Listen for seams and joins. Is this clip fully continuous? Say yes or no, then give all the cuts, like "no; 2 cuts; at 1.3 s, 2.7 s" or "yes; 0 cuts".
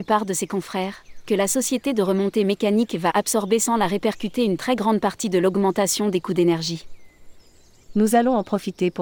no; 1 cut; at 7.8 s